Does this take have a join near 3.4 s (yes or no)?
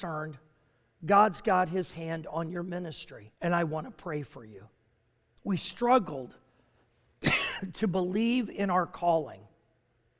yes